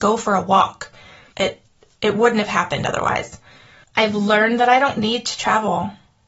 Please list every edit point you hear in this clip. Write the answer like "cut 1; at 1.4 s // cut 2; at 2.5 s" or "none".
cut 1; at 1.3 s // cut 2; at 3.8 s